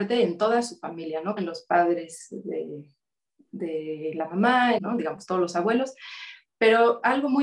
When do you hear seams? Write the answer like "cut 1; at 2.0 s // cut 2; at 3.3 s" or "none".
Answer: cut 1; at 1.4 s // cut 2; at 4.8 s